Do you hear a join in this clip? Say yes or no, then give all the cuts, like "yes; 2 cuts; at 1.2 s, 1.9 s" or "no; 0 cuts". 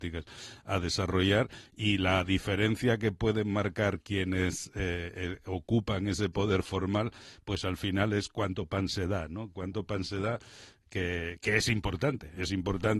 no; 0 cuts